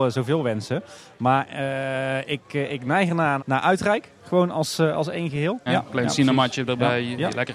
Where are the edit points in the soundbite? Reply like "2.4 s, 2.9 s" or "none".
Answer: 3.4 s, 5.7 s